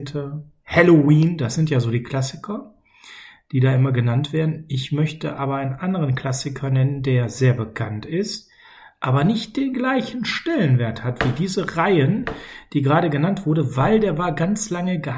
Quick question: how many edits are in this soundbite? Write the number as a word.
zero